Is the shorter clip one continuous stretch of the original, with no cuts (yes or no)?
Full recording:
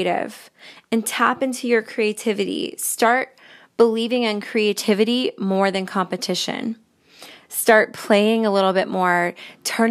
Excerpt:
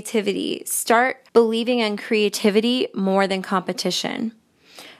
no